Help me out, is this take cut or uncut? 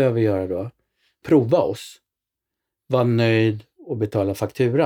cut